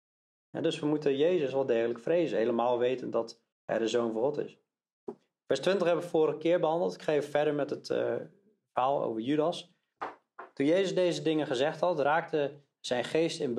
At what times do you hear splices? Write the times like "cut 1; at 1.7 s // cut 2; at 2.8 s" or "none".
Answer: cut 1; at 3.5 s